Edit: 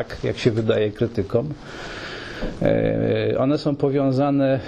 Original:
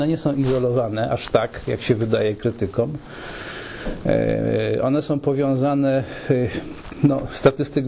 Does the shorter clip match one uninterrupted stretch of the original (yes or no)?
yes